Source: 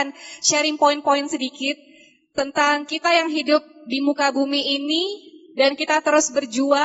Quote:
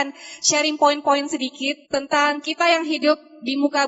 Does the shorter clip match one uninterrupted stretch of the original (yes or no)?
no